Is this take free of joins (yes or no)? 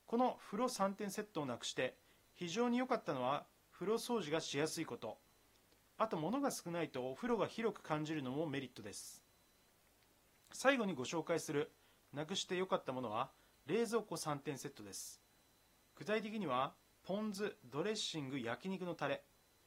yes